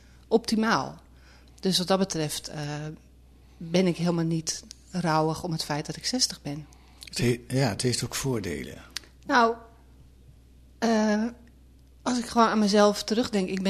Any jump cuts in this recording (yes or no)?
no